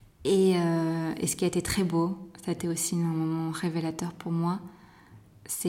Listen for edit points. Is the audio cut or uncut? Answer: uncut